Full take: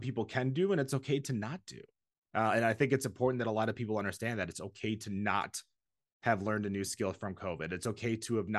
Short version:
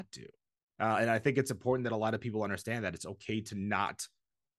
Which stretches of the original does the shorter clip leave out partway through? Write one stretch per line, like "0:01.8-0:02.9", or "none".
none